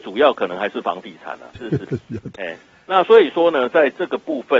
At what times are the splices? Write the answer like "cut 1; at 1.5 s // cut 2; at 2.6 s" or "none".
cut 1; at 1.6 s

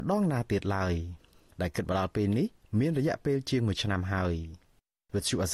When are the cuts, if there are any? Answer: none

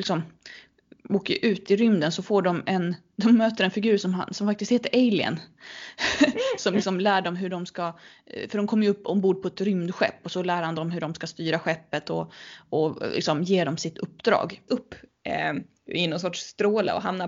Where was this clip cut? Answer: cut 1; at 14.7 s

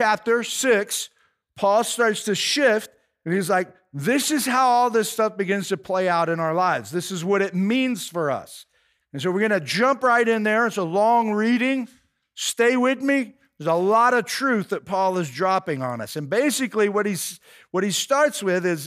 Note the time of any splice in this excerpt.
none

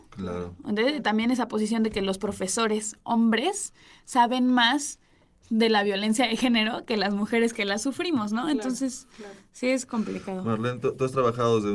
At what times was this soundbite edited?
none

